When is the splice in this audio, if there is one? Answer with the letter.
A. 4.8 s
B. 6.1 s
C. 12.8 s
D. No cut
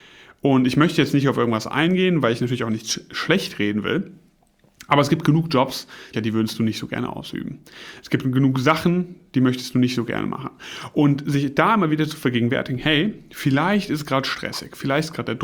B